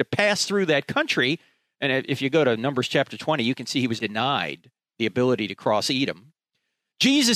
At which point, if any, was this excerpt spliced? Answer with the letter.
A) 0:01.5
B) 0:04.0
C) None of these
B